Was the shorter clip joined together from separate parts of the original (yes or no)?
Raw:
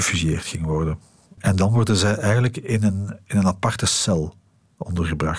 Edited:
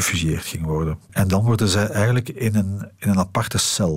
yes